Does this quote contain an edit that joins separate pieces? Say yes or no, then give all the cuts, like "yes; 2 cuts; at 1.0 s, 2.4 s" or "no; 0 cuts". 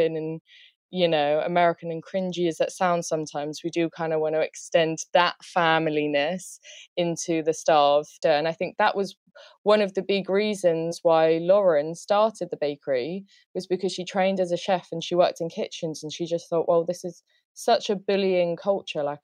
yes; 1 cut; at 8.2 s